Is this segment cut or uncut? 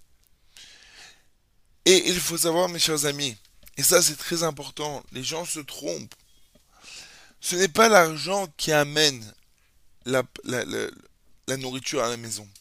uncut